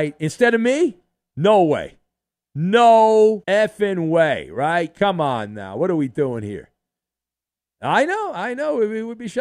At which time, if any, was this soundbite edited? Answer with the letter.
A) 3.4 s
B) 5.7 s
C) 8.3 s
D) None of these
A